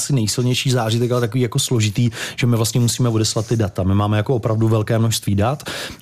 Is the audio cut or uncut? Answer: uncut